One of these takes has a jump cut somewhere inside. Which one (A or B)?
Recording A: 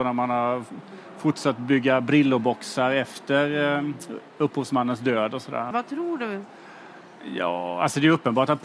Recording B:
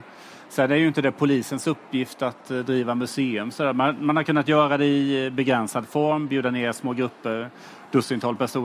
A